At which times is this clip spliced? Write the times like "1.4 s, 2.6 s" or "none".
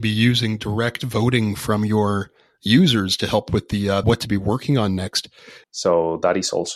4.0 s, 5.6 s